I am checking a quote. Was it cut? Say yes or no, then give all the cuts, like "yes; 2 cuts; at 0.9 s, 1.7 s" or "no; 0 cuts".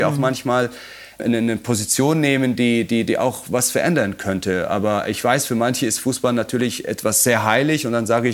no; 0 cuts